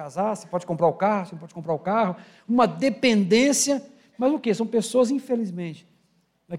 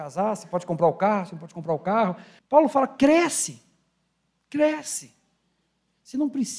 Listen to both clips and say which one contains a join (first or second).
second